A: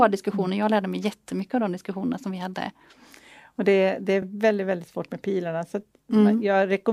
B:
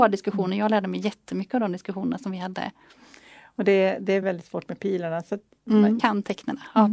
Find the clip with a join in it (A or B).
B